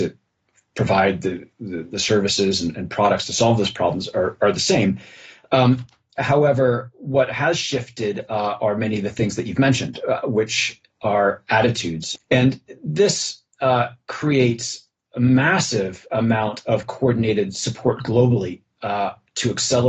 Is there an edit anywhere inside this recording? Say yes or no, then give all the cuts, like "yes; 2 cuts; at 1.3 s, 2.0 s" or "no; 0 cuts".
yes; 1 cut; at 12.2 s